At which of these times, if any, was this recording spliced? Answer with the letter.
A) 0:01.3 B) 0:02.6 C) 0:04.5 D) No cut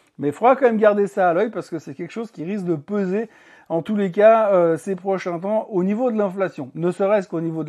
D